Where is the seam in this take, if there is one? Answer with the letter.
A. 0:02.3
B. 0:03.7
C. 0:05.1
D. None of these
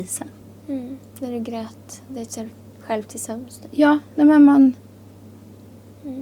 D